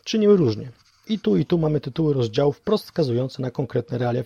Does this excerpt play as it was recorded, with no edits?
no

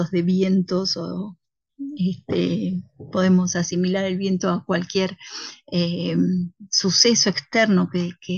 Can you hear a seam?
no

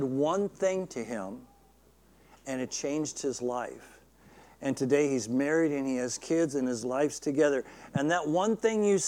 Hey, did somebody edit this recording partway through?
no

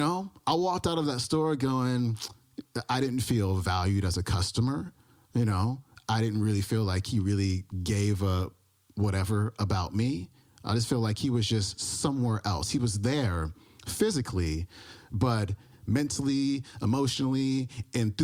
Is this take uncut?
yes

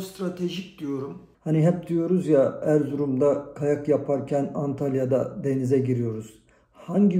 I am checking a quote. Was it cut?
yes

